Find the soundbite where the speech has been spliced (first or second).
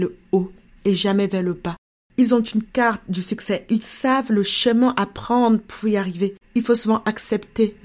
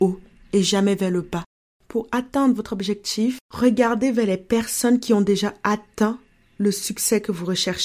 first